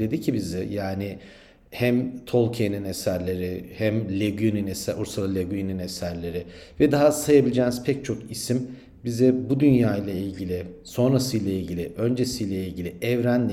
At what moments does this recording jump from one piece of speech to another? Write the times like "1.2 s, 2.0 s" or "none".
none